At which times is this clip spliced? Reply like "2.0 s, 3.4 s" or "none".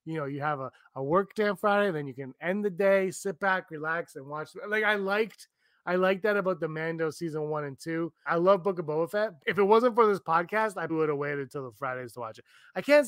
8.3 s, 9.4 s, 10.9 s